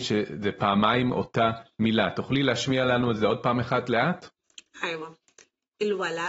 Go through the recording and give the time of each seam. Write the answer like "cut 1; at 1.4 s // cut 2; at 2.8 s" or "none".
none